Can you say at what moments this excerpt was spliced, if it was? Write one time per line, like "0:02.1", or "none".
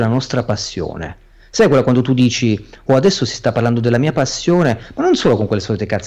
none